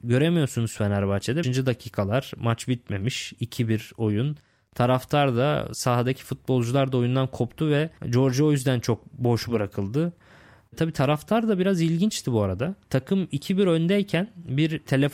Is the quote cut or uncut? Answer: cut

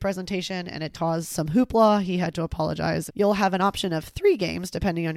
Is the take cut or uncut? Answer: cut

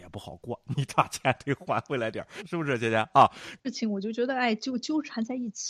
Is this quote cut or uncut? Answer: cut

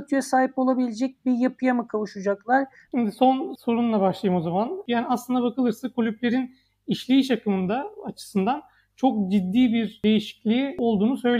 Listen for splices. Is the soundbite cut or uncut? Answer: cut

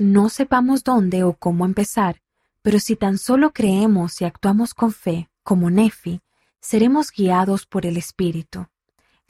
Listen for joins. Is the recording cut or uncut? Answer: uncut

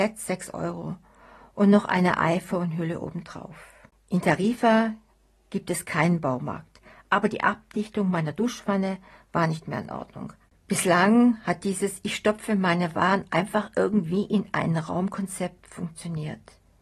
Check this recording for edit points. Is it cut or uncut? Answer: cut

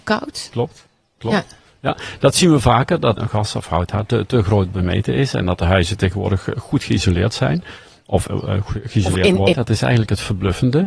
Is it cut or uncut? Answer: cut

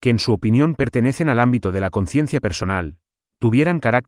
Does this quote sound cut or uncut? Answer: uncut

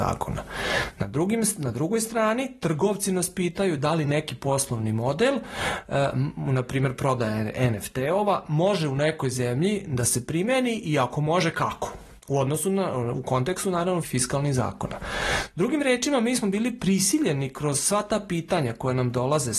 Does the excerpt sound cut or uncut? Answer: cut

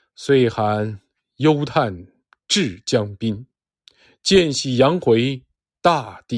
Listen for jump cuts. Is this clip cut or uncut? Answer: uncut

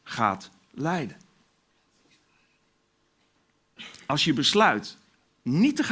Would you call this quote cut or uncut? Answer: uncut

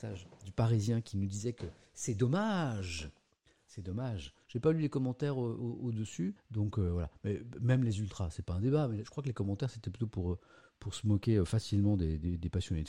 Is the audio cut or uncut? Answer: cut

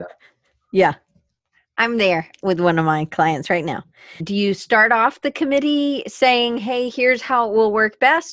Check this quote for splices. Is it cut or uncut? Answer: cut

